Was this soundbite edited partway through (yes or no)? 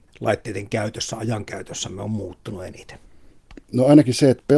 no